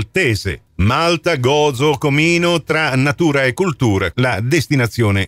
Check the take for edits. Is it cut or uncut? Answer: cut